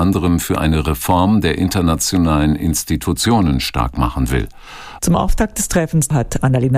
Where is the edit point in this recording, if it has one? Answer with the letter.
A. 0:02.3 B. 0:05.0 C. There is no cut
B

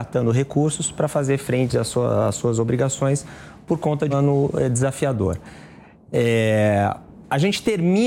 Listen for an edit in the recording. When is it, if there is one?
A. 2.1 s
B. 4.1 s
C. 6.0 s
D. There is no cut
B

